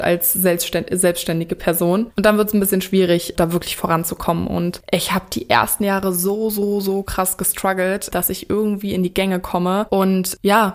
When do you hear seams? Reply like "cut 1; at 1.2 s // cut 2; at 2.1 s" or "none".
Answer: none

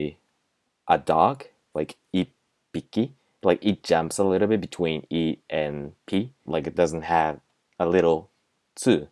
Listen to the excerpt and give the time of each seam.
cut 1; at 6.5 s

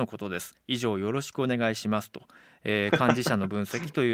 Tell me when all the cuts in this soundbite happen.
none

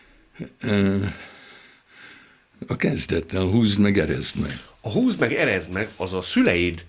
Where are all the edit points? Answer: cut 1; at 2.5 s

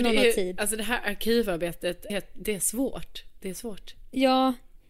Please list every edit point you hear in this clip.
cut 1; at 2.1 s

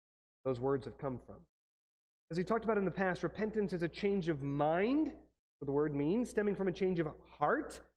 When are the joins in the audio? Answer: none

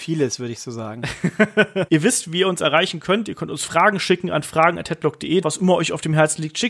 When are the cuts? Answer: cut 1; at 1.9 s // cut 2; at 5.4 s

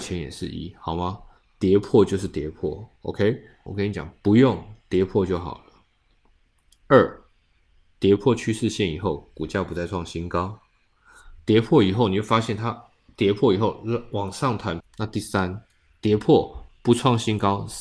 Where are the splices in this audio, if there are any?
cut 1; at 3.7 s // cut 2; at 14.8 s

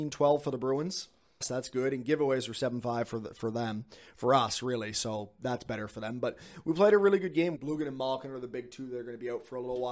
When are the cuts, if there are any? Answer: cut 1; at 1.4 s // cut 2; at 7.6 s

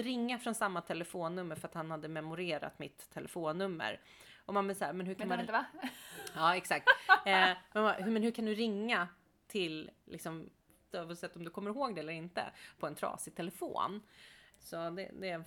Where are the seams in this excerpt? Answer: cut 1; at 10.9 s // cut 2; at 14.5 s

